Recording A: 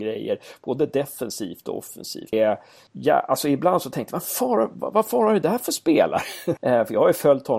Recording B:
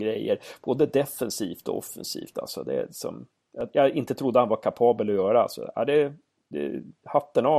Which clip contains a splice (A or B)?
A